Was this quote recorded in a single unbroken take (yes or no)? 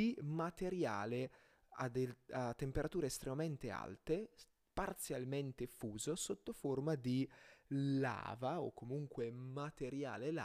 yes